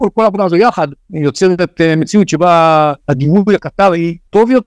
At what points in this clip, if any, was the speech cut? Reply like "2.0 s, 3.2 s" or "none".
1.0 s, 3.0 s